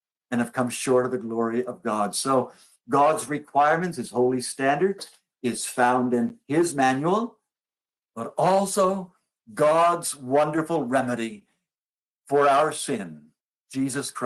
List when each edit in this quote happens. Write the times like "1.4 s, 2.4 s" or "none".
8.0 s